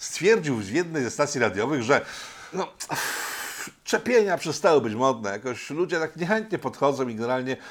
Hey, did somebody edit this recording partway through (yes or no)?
yes